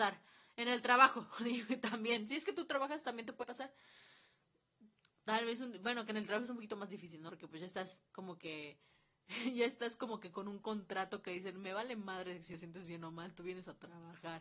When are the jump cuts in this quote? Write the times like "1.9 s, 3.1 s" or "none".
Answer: none